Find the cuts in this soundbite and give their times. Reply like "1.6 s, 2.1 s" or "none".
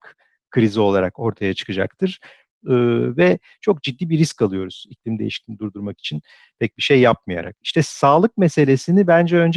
2.6 s